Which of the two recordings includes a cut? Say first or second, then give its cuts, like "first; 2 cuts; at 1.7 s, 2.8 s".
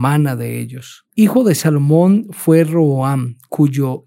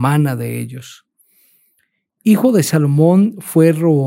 first; 1 cut; at 1.1 s